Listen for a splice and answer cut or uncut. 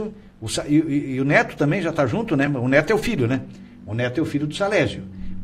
uncut